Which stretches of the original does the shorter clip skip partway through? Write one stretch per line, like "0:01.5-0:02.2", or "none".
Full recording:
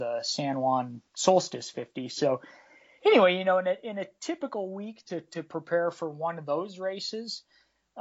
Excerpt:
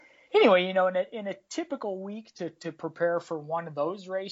none